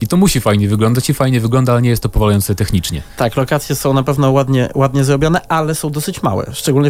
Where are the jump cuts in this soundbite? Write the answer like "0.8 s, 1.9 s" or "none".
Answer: none